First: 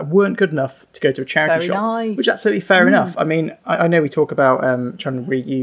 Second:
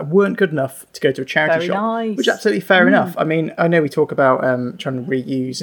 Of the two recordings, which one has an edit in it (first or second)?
second